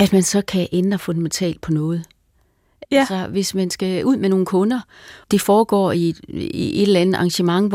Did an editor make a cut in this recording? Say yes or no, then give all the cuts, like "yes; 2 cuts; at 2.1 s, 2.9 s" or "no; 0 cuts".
yes; 2 cuts; at 2.8 s, 5.2 s